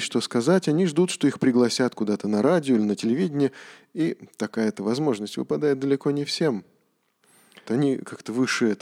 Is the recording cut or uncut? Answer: cut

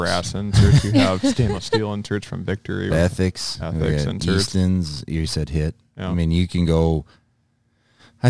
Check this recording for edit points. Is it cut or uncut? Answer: cut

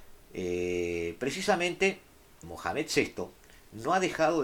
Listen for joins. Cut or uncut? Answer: cut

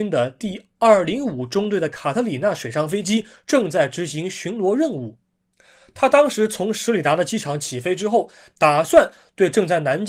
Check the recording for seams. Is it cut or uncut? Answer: uncut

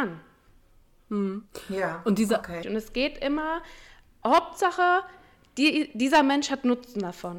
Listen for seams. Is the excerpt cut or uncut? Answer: cut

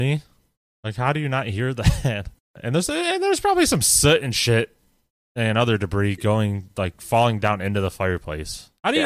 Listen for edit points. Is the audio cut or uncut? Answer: uncut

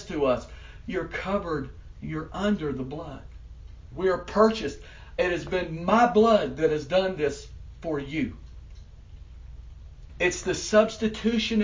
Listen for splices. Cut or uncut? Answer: cut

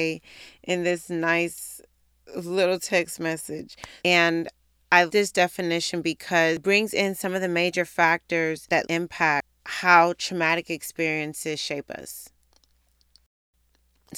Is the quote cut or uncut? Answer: cut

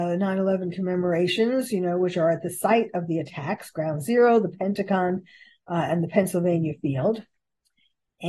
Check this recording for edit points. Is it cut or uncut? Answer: uncut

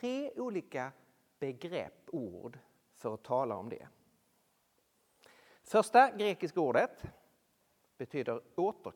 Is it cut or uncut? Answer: uncut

